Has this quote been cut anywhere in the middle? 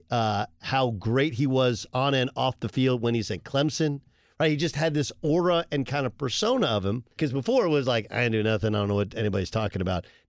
yes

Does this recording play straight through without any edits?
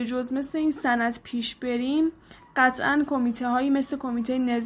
yes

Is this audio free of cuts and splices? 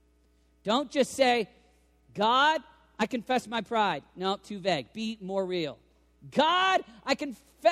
yes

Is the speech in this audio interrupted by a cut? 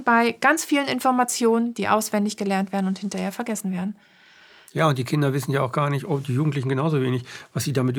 no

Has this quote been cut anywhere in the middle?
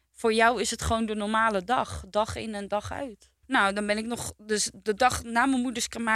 yes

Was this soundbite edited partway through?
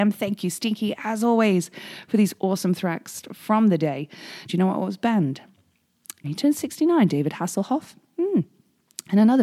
yes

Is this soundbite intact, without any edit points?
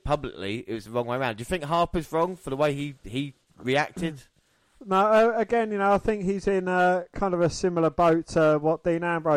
yes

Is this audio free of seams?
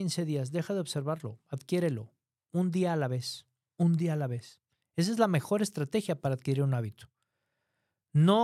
yes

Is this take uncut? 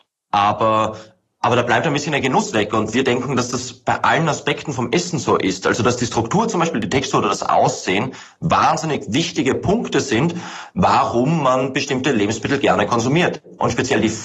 yes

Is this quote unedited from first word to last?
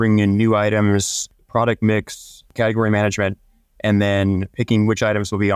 yes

